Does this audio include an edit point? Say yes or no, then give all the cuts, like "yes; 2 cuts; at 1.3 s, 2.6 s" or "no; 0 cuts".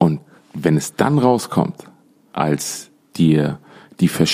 yes; 1 cut; at 2.3 s